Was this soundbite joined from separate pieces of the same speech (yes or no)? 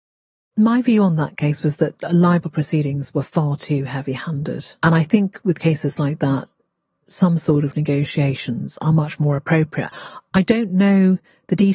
no